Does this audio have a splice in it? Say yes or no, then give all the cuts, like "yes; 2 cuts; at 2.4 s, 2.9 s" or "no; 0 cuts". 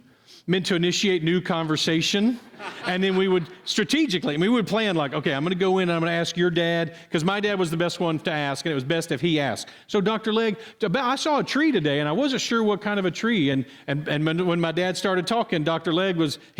no; 0 cuts